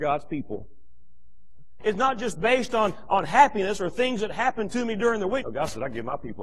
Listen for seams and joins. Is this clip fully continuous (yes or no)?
no